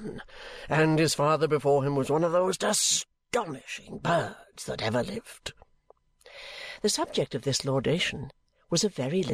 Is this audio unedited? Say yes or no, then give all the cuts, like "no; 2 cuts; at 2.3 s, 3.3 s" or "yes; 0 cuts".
yes; 0 cuts